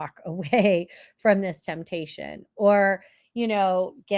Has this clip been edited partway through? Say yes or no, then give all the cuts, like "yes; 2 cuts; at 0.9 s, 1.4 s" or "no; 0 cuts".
no; 0 cuts